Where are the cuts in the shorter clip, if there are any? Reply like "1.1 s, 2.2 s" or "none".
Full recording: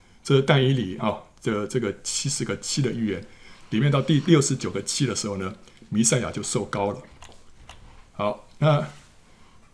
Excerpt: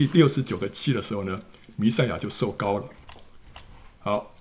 none